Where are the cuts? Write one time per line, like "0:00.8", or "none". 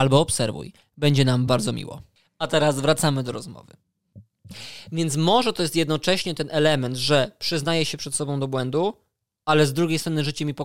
0:01.5